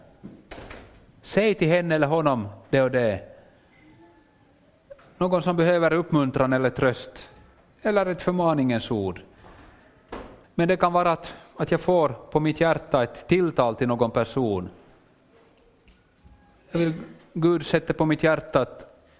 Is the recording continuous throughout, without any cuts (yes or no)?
no